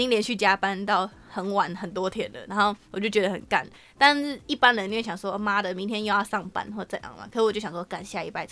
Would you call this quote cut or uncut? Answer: cut